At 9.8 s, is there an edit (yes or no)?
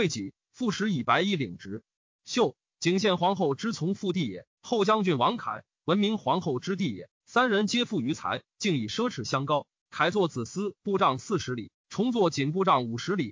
yes